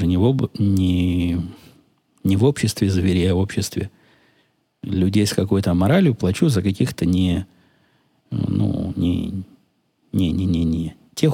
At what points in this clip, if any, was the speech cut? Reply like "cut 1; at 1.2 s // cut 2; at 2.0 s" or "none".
none